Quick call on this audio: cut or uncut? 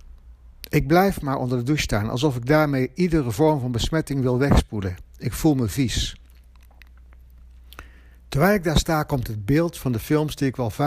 uncut